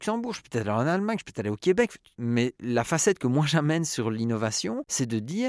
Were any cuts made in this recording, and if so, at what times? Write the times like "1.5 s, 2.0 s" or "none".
2.1 s